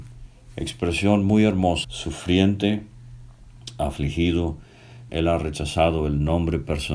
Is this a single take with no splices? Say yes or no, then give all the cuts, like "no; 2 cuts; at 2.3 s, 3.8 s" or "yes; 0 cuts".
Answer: no; 2 cuts; at 1.8 s, 5.1 s